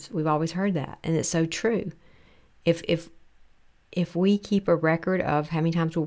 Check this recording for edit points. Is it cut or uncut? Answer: uncut